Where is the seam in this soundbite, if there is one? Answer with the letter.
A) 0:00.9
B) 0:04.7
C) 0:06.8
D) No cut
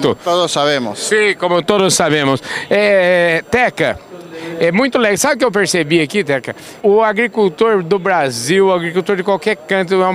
C